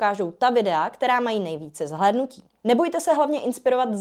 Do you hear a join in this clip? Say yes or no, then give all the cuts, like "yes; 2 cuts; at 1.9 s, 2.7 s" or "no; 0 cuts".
yes; 1 cut; at 2.5 s